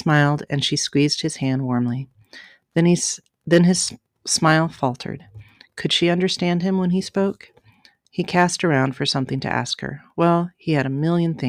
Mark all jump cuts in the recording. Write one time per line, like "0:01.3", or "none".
none